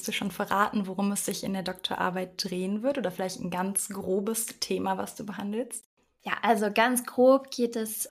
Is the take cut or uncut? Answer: uncut